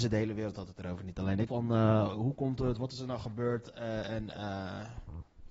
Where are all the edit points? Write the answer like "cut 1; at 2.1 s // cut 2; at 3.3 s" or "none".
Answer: cut 1; at 1.5 s